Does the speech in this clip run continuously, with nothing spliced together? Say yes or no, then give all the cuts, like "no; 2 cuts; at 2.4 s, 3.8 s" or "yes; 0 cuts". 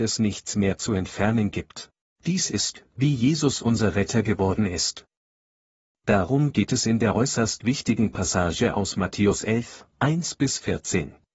no; 1 cut; at 2.2 s